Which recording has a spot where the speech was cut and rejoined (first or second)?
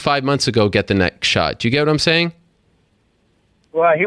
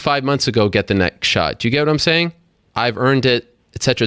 second